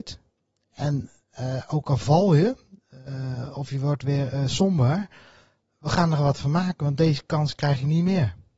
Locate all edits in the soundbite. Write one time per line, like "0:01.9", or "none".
none